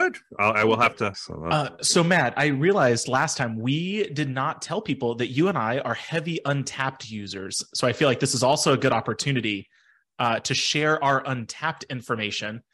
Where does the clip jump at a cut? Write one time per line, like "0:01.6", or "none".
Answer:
0:01.1